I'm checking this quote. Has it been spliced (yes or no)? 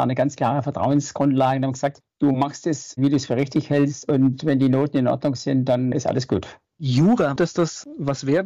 yes